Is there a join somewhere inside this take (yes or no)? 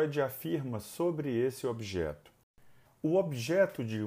yes